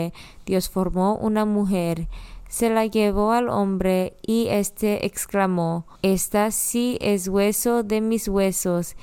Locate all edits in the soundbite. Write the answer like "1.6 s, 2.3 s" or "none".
6.0 s

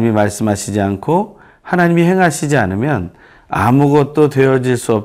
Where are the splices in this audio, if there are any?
none

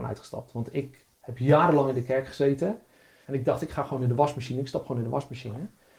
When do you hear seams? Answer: 1.1 s, 3.2 s

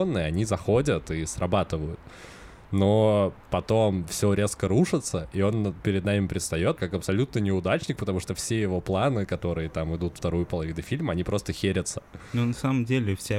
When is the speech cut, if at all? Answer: 6.8 s

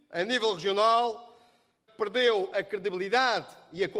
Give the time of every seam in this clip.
1.9 s

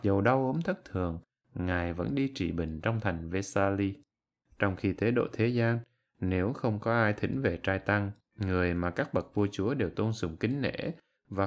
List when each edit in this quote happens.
4.4 s, 8.2 s

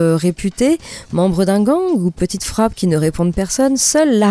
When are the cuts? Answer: none

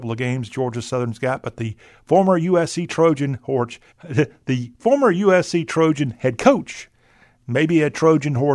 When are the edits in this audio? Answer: 3.9 s

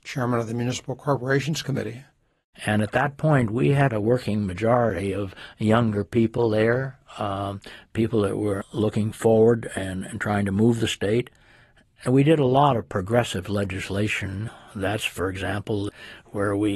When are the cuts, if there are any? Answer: 2.5 s

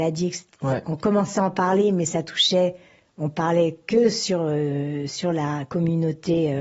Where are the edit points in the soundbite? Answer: none

